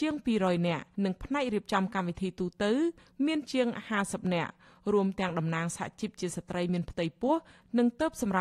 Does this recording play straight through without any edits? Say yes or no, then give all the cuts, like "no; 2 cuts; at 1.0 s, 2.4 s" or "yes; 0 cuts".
no; 1 cut; at 0.9 s